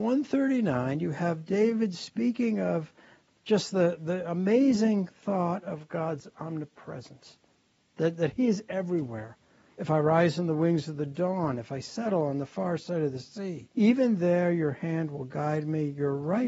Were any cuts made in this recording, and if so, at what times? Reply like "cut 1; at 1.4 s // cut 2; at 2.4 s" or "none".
cut 1; at 9.7 s // cut 2; at 13.7 s